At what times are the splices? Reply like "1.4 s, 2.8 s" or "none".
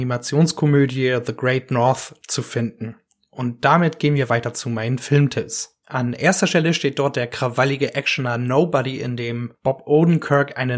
5.8 s